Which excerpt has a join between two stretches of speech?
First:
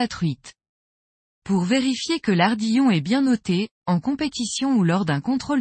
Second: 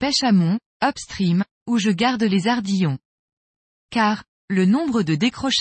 second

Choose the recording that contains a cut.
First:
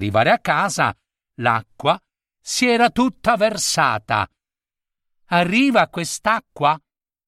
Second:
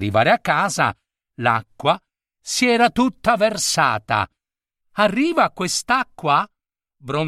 second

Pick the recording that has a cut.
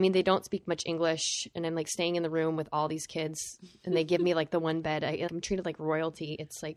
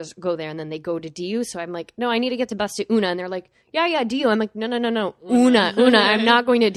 first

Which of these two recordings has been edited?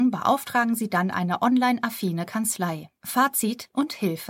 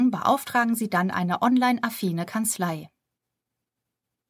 first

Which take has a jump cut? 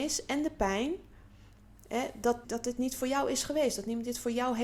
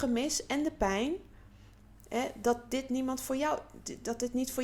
first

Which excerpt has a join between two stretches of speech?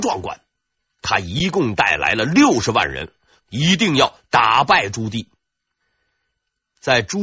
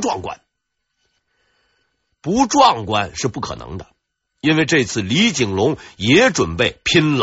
first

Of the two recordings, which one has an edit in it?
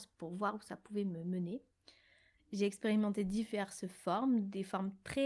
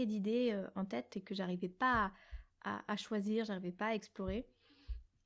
first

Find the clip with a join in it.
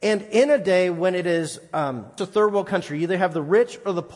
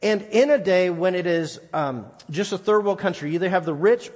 first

